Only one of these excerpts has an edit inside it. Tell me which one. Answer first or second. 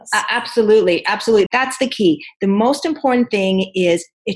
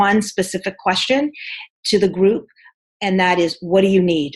first